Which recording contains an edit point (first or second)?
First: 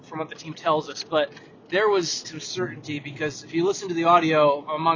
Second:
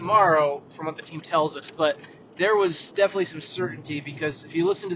first